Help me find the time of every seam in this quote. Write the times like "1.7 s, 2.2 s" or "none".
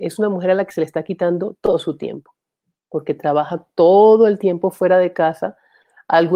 none